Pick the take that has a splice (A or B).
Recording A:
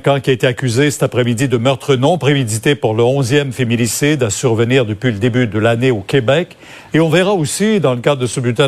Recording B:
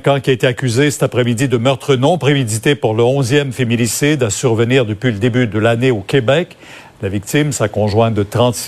A